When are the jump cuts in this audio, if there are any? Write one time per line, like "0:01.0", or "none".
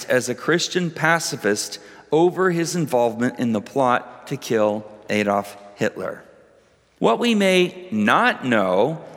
0:07.0